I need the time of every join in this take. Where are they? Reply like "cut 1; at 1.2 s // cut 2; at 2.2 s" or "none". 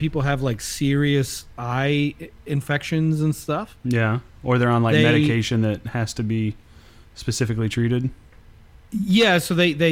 none